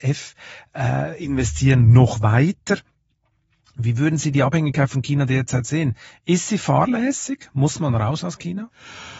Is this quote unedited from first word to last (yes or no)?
yes